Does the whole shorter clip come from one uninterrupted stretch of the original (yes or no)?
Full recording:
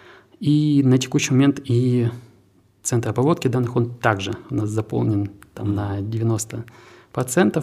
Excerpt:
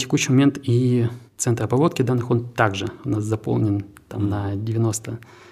no